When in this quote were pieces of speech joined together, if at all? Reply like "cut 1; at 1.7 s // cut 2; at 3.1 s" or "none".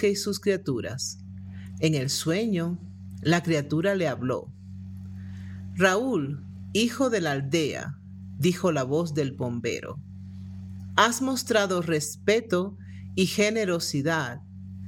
cut 1; at 1.7 s